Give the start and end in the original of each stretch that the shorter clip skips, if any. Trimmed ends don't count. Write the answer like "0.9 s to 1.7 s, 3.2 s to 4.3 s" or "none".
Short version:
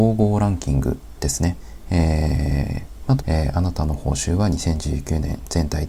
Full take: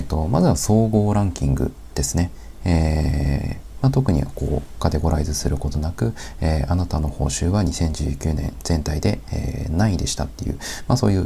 3.9 s to 6.3 s